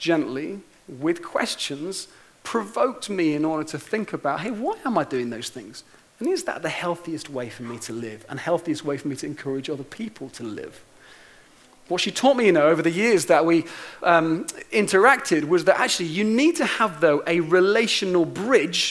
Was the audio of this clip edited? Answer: no; 0 cuts

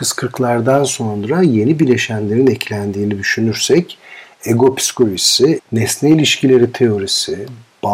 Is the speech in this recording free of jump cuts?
no; 1 cut; at 5.6 s

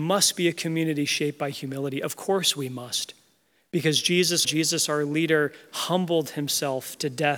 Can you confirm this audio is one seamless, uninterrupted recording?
no; 1 cut; at 4.4 s

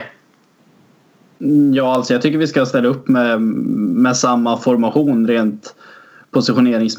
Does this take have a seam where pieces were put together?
no; 0 cuts

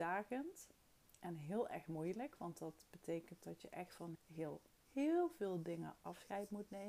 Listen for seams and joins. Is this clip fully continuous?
no; 1 cut; at 4.1 s

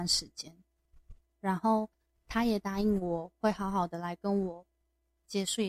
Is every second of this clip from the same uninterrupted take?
yes; 0 cuts

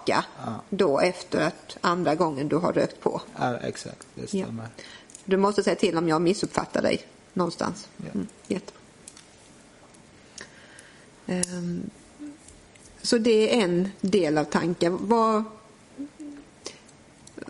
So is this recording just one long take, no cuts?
yes; 0 cuts

